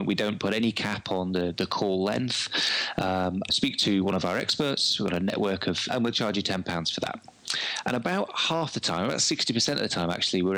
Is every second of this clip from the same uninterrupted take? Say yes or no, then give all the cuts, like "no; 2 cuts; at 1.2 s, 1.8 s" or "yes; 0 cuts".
no; 2 cuts; at 3.5 s, 5.9 s